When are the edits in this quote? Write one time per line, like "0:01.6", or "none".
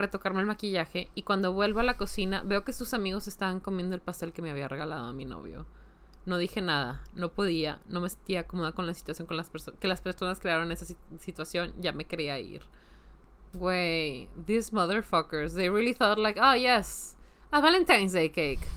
none